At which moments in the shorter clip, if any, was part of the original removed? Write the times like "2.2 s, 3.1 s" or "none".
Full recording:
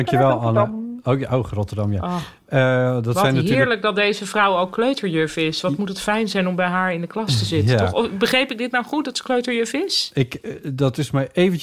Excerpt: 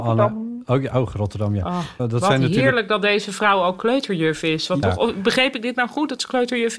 2.0 s, 4.8 s